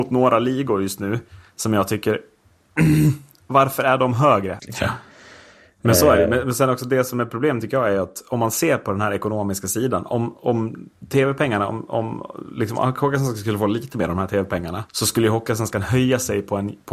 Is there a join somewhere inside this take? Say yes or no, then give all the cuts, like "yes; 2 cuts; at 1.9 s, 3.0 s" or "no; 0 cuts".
yes; 2 cuts; at 4.6 s, 14.9 s